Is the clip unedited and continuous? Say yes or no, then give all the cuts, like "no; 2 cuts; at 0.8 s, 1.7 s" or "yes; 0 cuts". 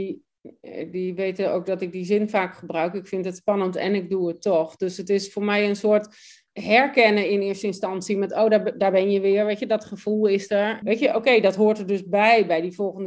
no; 1 cut; at 10.8 s